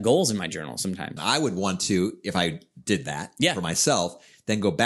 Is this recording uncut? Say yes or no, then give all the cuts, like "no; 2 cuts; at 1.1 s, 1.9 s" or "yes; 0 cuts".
no; 1 cut; at 1.2 s